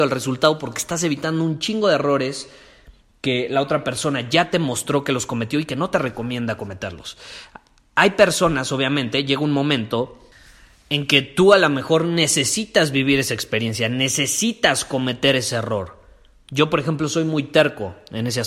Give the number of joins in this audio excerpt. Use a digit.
0